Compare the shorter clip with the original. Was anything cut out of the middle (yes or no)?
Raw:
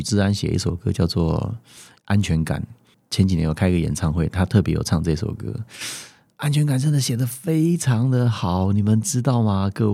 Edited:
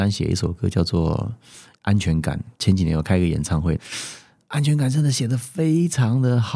yes